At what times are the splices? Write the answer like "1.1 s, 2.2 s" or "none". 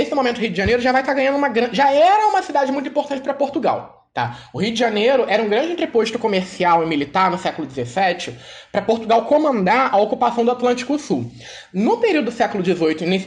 none